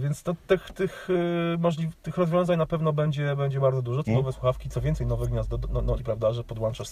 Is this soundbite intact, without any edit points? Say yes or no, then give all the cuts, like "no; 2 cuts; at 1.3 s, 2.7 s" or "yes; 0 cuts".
no; 3 cuts; at 2.0 s, 4.0 s, 6.0 s